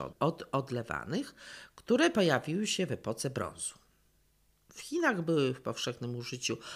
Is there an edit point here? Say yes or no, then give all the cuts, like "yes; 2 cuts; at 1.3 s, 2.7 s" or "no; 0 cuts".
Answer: no; 0 cuts